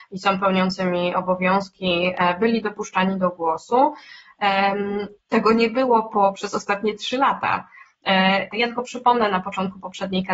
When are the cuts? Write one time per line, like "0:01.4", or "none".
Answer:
0:05.2
0:08.5